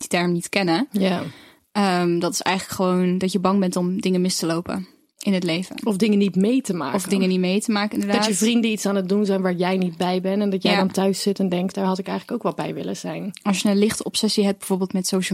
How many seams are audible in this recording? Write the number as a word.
one